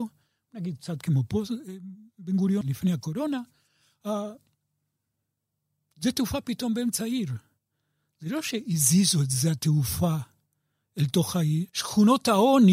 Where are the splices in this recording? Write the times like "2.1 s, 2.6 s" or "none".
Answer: 2.6 s, 11.7 s